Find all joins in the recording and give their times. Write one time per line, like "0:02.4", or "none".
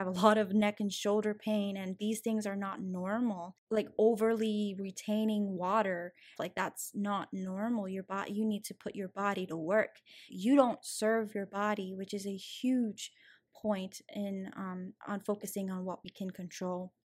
0:06.4
0:10.3